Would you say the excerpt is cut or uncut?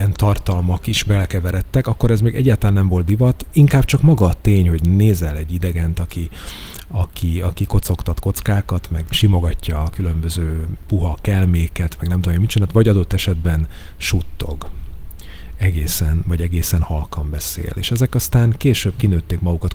uncut